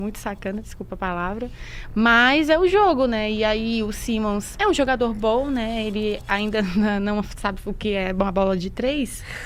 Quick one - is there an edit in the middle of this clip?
no; 0 cuts

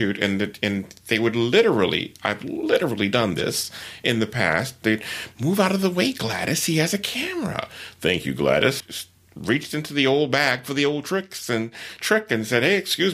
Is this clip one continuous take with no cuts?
no; 1 cut; at 8.8 s

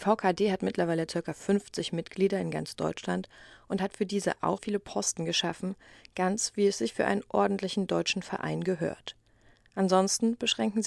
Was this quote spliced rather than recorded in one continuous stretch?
yes; 1 cut; at 4.6 s

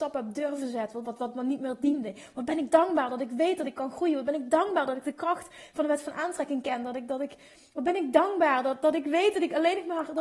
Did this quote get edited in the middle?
yes; 1 cut; at 1.0 s

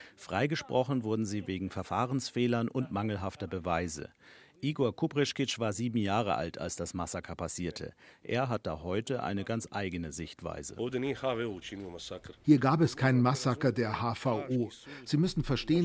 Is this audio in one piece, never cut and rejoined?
yes; 0 cuts

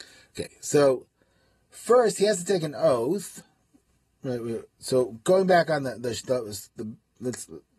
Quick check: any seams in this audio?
no; 0 cuts

